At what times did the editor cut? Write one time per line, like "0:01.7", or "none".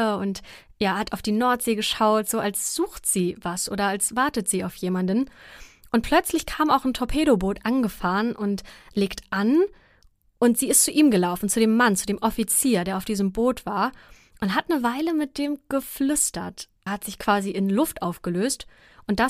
0:16.9

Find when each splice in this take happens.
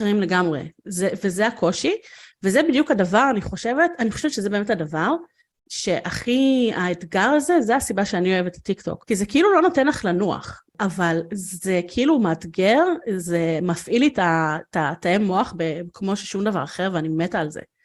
0:09.0

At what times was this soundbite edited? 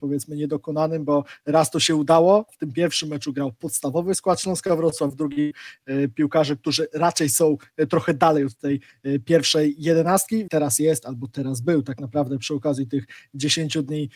0:02.5
0:10.5

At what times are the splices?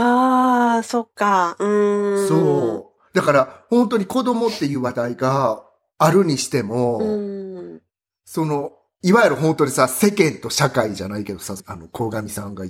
0:11.6

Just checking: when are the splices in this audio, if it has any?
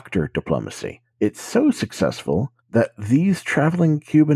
0:01.1
0:02.6

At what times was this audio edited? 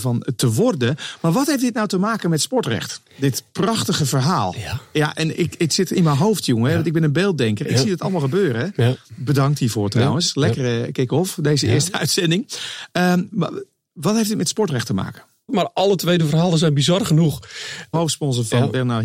0:15.5
0:17.9

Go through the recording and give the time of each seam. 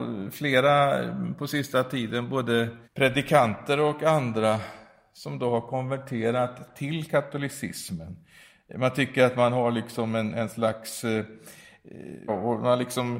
0:02.8
0:12.3

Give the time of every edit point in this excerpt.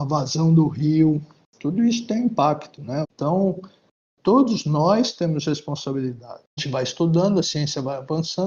0:03.0
0:06.6

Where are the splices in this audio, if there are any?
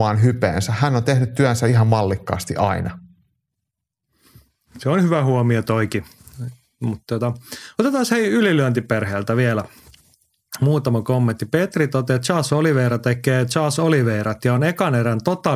none

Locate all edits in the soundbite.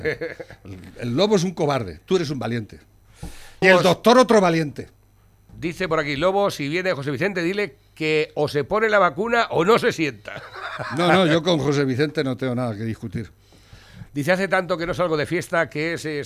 0:03.6

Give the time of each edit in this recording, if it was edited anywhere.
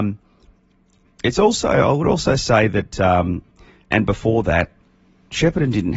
0:03.9

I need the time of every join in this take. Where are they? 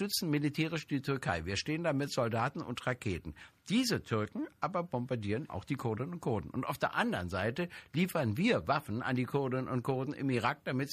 0:05.5

